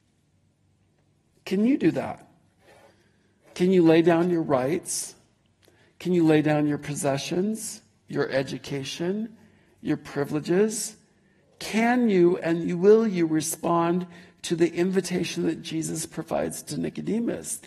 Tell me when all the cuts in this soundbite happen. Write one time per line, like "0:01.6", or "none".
none